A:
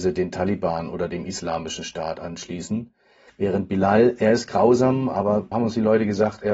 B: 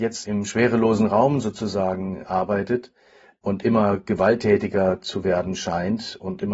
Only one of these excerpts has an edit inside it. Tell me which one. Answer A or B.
A